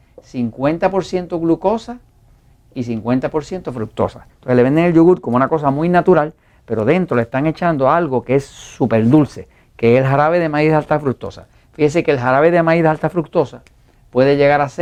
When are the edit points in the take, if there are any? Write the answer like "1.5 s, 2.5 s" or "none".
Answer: 4.3 s